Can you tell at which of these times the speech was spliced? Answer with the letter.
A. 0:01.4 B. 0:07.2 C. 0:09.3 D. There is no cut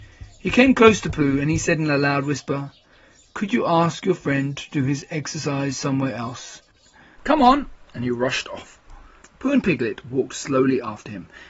B